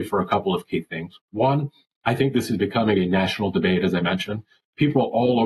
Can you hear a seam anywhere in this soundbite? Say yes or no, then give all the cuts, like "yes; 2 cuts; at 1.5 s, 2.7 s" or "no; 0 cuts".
no; 0 cuts